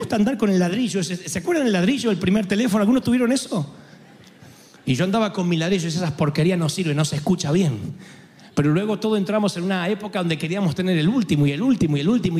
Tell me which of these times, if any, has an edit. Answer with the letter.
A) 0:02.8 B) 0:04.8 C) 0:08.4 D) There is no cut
B